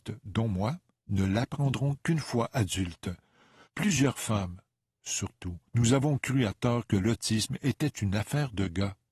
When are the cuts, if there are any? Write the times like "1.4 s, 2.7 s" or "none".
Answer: 3.6 s, 5.7 s